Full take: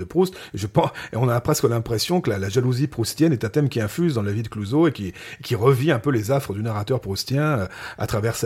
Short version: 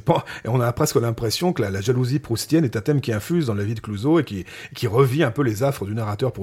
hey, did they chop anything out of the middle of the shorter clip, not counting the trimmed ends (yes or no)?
no